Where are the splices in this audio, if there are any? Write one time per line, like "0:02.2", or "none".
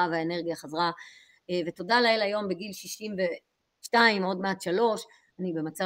none